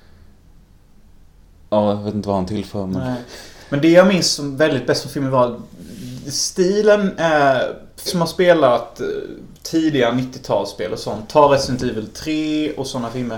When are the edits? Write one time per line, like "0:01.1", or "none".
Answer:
0:08.1